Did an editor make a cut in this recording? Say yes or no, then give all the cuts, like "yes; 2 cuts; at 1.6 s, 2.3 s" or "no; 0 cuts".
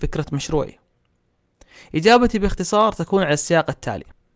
no; 0 cuts